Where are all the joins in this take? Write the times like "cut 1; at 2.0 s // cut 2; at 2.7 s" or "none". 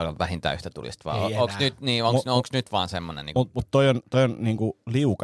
none